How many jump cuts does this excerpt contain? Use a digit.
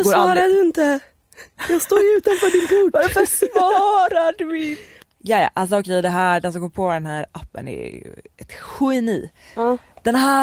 1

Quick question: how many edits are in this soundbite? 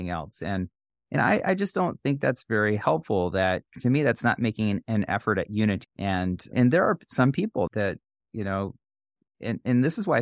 2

